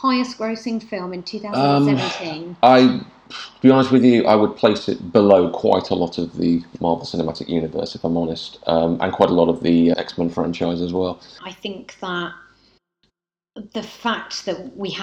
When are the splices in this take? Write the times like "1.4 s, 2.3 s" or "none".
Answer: 9.9 s, 11.4 s